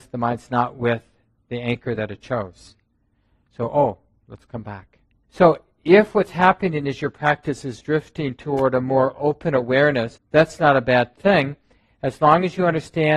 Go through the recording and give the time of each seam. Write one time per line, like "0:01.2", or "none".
0:05.2
0:10.2